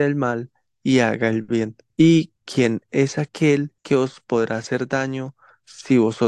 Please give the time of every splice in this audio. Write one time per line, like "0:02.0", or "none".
0:01.9
0:03.8

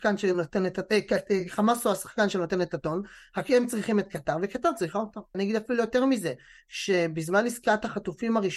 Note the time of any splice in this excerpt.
0:05.3

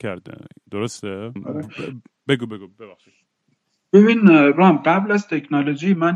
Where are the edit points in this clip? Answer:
0:01.4

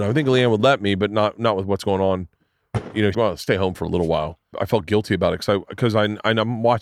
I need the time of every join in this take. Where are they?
0:03.1
0:04.5

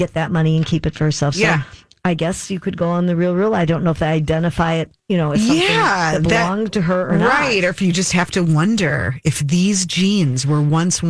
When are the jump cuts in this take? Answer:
0:05.0

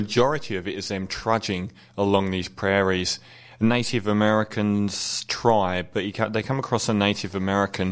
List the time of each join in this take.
0:03.5

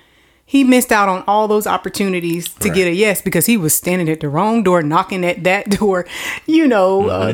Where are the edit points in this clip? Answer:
none

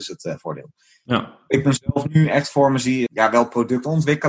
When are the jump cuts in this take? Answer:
0:03.1

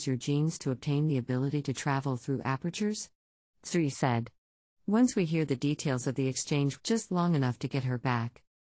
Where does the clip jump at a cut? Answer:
0:06.8

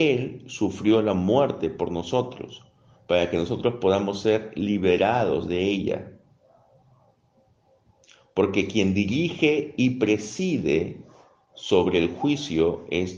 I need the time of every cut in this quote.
none

